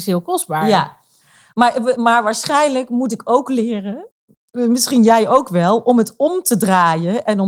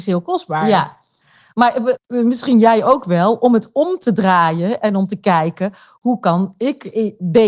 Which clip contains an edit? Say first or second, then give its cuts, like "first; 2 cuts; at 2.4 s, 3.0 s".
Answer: second; 1 cut; at 2.0 s